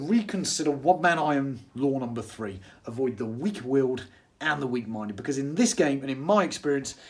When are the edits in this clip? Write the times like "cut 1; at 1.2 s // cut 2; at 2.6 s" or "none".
none